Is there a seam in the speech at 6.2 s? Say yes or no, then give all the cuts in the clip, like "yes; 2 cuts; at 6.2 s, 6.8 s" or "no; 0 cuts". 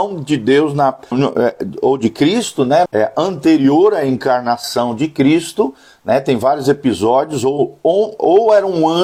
no; 2 cuts; at 1.1 s, 2.9 s